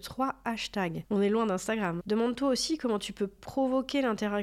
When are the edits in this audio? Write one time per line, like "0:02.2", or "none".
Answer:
0:02.0